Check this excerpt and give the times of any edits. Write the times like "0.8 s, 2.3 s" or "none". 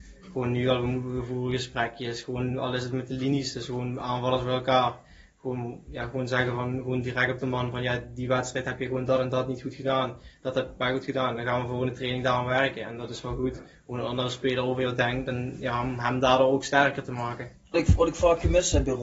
17.7 s